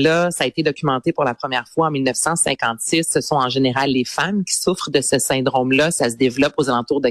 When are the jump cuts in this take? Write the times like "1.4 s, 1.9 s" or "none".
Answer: none